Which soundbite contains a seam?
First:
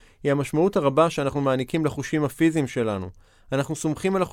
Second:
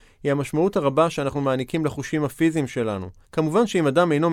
second; 1 cut; at 3.2 s

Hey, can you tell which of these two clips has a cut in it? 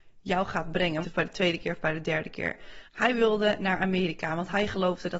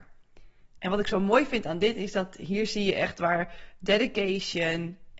first; 2 cuts; at 1.0 s, 2.9 s

